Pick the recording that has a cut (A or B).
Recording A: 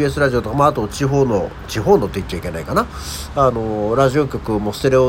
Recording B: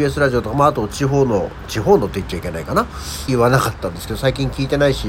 B